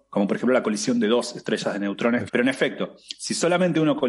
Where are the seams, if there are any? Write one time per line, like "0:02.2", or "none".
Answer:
0:02.3

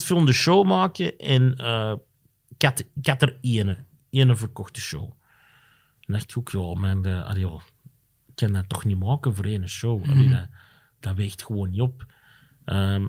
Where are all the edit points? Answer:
none

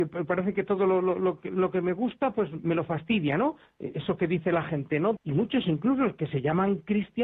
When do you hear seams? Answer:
0:05.2

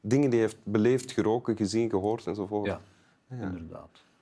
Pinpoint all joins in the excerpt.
none

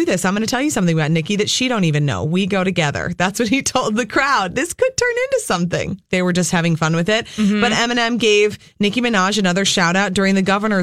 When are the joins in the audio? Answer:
0:06.1

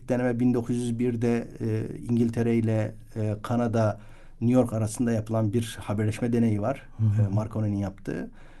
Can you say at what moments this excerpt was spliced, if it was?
none

